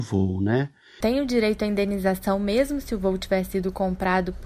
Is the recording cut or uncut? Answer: cut